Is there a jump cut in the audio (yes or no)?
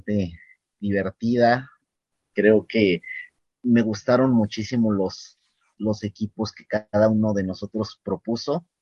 no